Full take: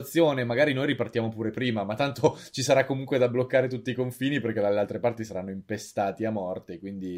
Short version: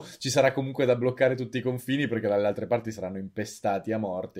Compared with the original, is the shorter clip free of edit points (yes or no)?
yes